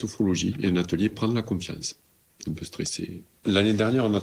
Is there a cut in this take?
yes; 1 cut; at 2.4 s

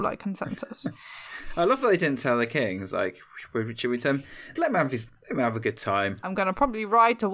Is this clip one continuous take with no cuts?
no; 2 cuts; at 4.6 s, 6.2 s

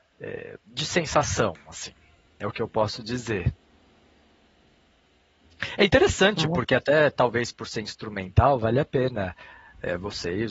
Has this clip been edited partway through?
no; 0 cuts

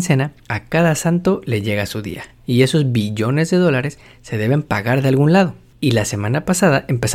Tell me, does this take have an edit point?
no; 0 cuts

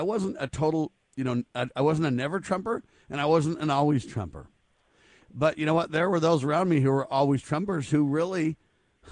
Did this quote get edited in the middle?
no; 0 cuts

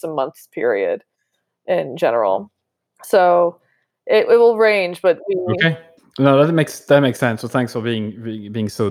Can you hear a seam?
no; 0 cuts

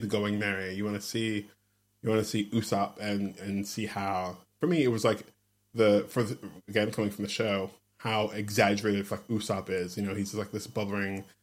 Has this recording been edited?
yes; 1 cut; at 9.1 s

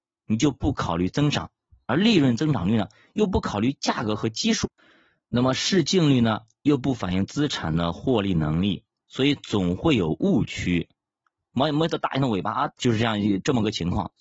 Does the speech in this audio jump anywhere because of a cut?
yes; 2 cuts; at 11.5 s, 12.8 s

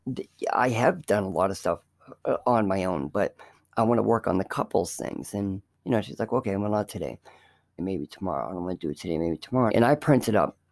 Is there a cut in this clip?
yes; 2 cuts; at 7.8 s, 9.7 s

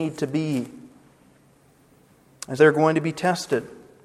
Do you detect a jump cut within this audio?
yes; 1 cut; at 2.6 s

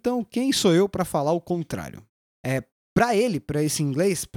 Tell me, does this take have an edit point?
yes; 1 cut; at 2.4 s

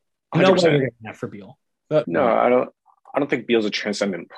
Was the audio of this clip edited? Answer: yes; 1 cut; at 2.0 s

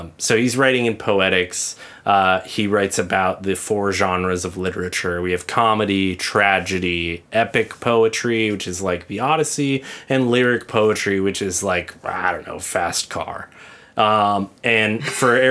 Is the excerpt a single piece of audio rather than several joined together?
yes; 0 cuts

